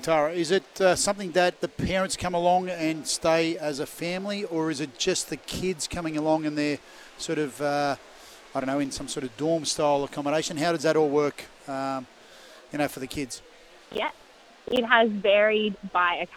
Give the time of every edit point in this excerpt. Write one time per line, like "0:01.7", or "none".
none